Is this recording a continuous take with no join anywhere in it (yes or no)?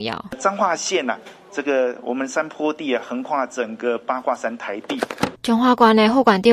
no